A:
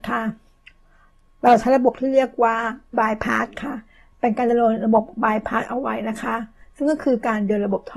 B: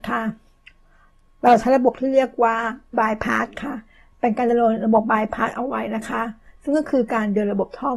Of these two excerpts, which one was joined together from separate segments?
B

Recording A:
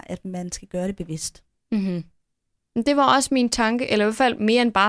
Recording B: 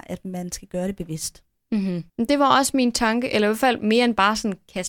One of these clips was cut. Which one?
B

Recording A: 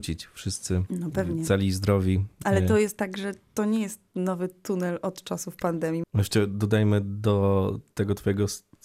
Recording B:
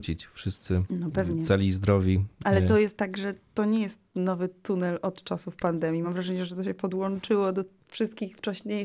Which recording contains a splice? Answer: A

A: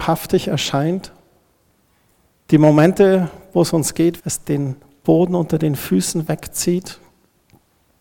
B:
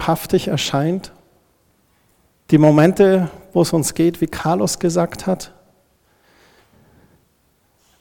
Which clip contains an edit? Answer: A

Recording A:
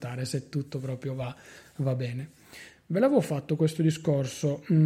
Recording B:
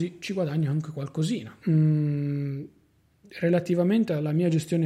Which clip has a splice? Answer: B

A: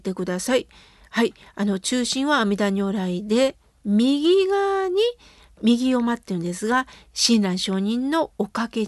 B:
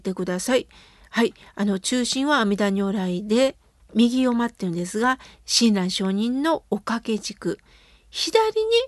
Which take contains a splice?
B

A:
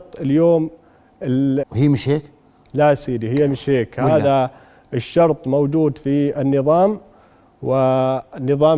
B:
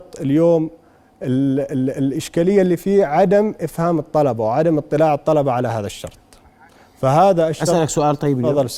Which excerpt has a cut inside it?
A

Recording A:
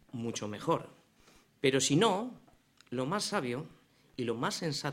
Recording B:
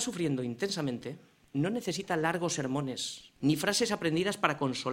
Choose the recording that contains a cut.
B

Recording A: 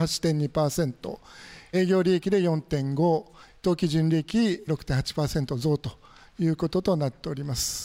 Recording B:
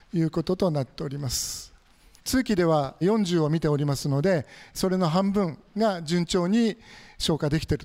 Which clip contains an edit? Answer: B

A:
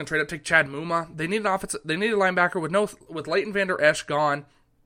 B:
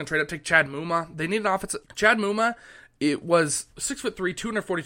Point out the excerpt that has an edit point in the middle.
B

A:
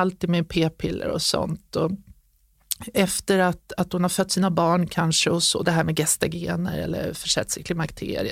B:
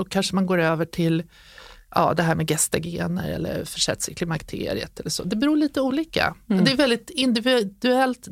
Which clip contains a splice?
A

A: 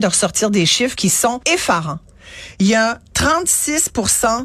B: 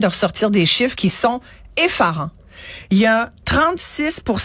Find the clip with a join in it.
A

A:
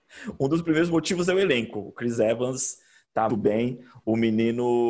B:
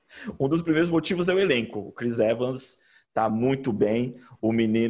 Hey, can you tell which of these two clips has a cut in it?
A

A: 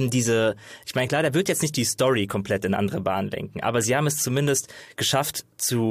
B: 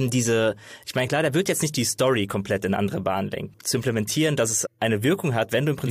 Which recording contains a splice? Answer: B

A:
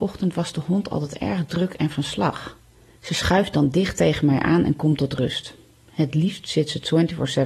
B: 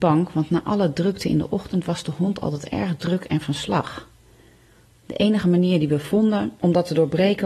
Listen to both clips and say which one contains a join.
A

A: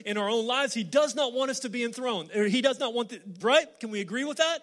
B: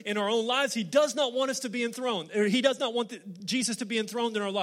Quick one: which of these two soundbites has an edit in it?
A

